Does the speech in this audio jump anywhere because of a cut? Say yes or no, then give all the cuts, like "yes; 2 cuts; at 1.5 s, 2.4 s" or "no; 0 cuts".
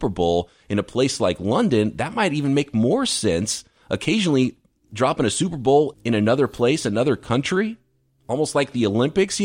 no; 0 cuts